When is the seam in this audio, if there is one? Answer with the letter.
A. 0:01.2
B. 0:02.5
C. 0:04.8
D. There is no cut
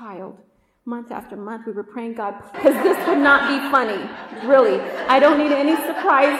B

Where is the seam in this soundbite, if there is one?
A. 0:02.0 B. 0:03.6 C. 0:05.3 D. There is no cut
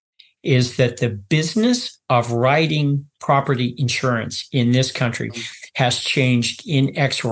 C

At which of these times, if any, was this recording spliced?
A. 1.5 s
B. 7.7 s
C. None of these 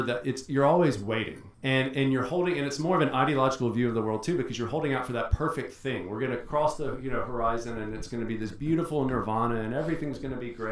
A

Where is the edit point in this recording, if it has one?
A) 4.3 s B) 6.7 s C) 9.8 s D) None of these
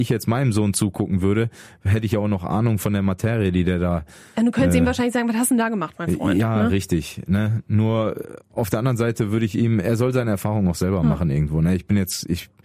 D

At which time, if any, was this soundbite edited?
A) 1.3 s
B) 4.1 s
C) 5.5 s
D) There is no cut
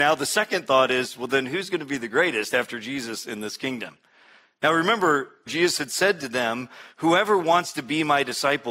C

